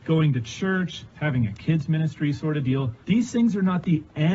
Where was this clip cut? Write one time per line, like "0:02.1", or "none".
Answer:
0:01.1
0:03.0